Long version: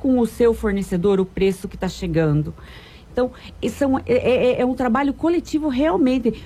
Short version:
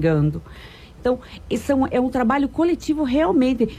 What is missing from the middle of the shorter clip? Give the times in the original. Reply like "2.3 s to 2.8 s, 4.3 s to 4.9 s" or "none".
4.0 s to 4.6 s